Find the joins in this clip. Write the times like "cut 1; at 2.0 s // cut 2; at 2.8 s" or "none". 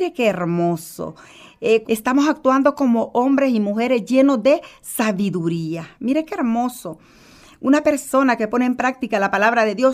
cut 1; at 1.8 s